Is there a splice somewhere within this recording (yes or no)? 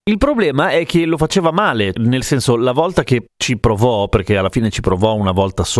yes